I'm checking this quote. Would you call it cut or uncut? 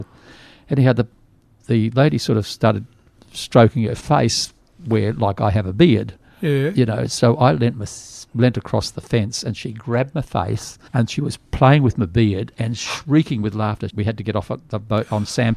cut